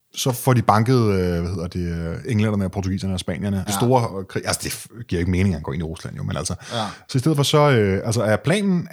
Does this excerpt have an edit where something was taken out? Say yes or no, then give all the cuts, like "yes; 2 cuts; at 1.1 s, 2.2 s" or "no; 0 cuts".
yes; 2 cuts; at 3.7 s, 7.0 s